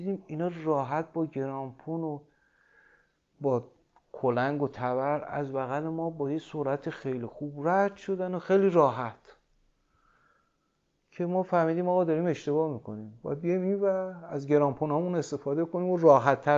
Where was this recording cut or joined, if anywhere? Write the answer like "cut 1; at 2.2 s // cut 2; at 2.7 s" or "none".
none